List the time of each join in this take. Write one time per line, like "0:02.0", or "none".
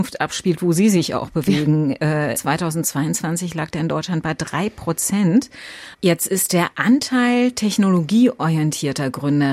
0:02.3
0:05.9